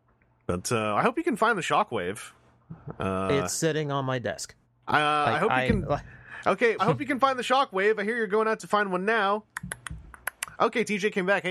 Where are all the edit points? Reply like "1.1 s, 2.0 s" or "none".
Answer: 4.8 s, 6.8 s